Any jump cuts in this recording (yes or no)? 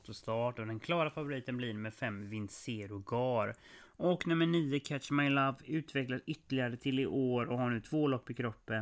yes